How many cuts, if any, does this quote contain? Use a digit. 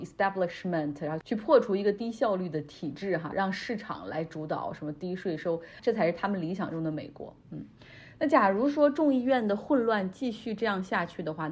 2